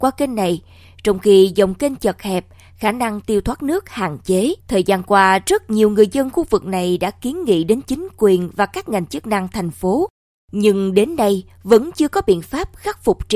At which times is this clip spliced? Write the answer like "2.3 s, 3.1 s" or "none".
4.6 s